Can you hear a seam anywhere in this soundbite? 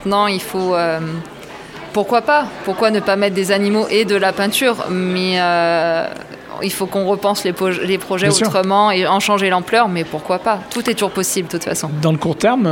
no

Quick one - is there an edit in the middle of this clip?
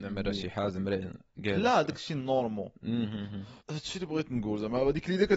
yes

